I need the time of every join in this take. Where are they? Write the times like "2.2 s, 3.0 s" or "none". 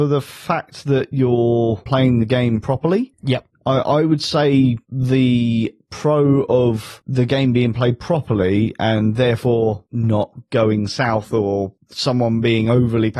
1.9 s